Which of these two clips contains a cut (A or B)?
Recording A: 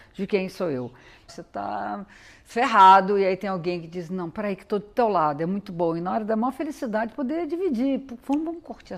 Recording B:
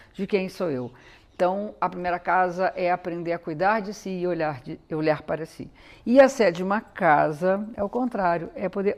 A